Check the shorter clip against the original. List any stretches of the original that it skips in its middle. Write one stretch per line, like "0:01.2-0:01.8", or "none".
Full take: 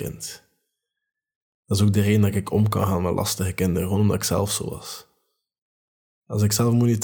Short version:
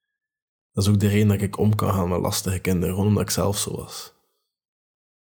none